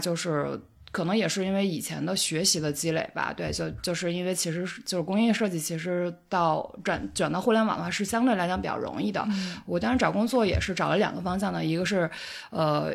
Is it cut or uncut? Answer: uncut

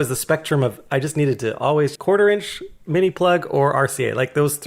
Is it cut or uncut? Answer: cut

